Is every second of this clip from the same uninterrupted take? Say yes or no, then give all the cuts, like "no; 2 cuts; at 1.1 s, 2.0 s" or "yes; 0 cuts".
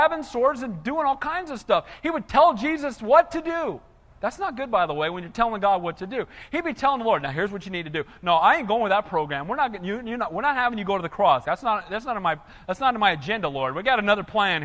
no; 1 cut; at 11.4 s